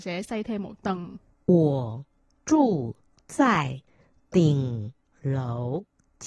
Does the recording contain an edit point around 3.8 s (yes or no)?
no